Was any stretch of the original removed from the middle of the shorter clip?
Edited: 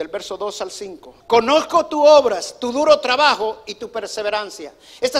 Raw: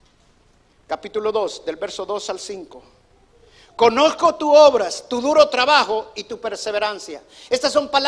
yes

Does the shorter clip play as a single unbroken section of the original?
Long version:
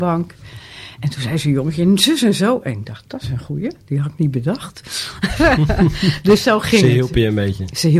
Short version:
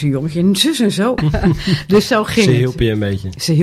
no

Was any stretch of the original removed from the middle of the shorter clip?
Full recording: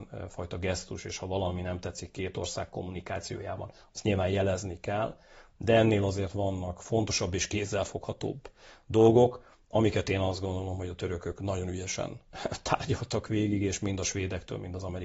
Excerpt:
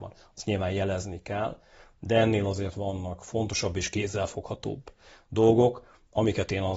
no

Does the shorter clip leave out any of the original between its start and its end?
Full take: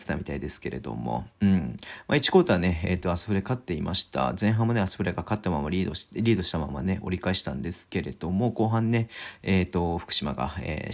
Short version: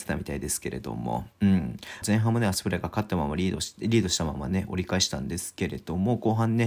yes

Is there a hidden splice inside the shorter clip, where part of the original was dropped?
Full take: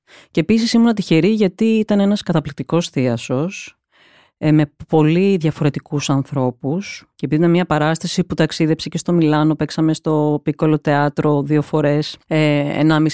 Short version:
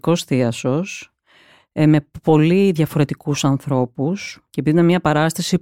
no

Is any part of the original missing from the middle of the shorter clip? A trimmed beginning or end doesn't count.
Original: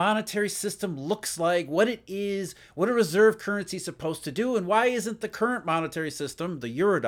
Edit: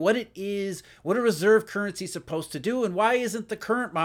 no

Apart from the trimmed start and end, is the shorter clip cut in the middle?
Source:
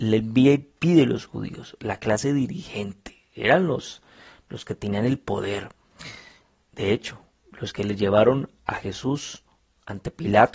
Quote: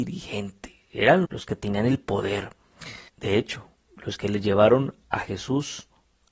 yes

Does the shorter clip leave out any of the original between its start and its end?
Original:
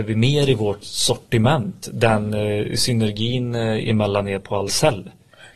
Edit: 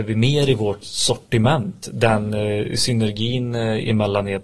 no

